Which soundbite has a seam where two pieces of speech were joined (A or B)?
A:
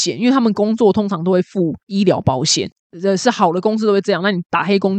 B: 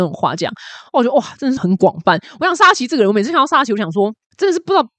B